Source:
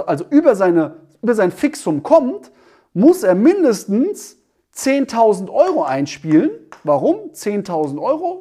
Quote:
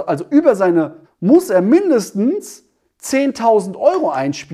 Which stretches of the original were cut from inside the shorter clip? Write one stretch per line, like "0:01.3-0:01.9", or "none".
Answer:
0:01.0-0:02.8

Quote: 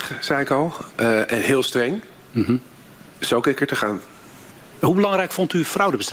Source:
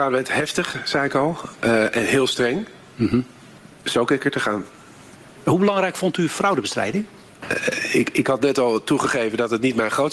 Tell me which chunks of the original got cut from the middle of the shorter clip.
none

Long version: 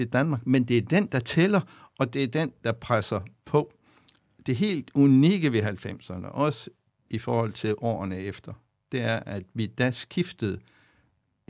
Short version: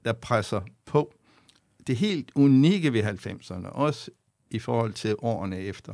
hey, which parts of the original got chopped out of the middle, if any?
none

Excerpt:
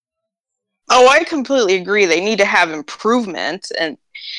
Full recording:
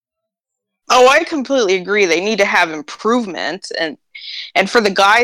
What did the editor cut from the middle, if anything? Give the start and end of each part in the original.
none

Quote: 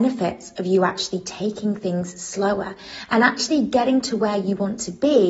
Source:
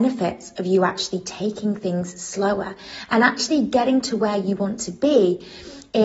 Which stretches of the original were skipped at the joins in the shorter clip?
none

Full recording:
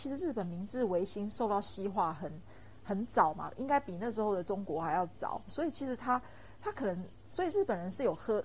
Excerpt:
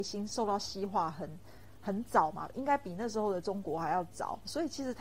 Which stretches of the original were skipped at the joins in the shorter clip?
none

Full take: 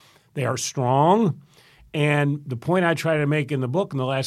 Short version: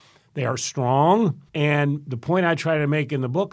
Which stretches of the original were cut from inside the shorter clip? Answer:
0:01.5-0:01.9

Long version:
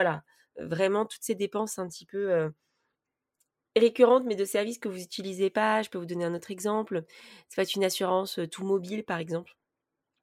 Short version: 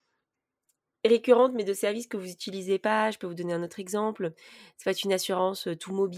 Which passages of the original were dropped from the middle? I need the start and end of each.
none

